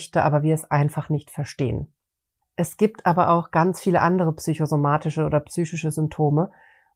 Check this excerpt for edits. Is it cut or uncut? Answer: cut